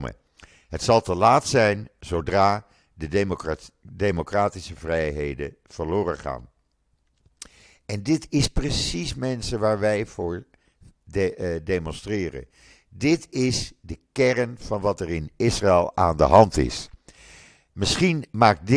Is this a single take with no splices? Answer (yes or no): yes